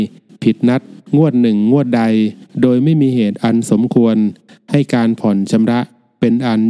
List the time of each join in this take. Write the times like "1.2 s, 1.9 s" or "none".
none

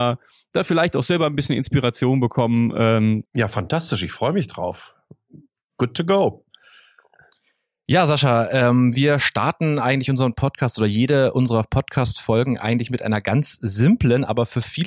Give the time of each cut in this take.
3.3 s

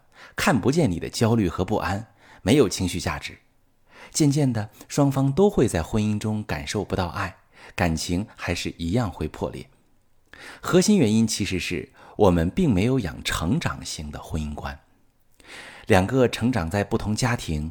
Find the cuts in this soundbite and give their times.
13.2 s

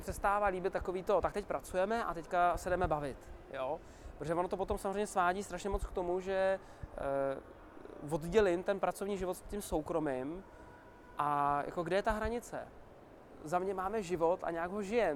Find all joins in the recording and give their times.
none

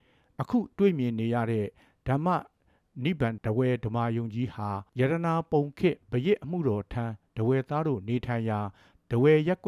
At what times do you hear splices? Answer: 3.4 s, 4.9 s

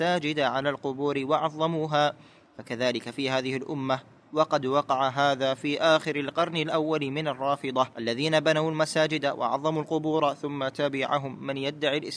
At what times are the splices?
7.9 s

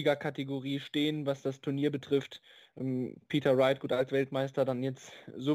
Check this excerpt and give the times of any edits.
none

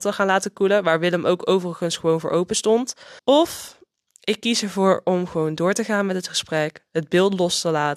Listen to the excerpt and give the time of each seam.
3.2 s

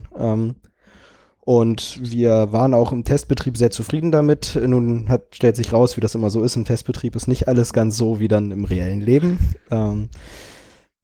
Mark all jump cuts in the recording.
none

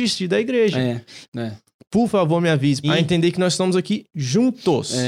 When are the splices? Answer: 1.2 s, 2.8 s

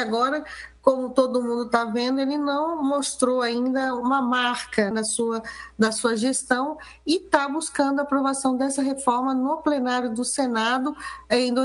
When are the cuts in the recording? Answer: 4.9 s

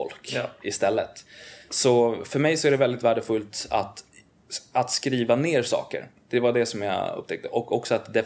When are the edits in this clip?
none

